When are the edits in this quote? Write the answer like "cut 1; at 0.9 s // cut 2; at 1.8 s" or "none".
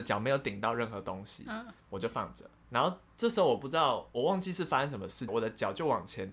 cut 1; at 1.8 s // cut 2; at 5.3 s